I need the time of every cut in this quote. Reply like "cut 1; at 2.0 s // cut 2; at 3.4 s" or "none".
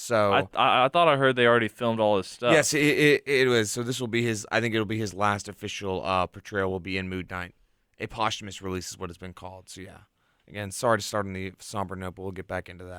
none